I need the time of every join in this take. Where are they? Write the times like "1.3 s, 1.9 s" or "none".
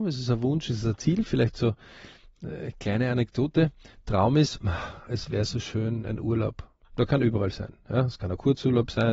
none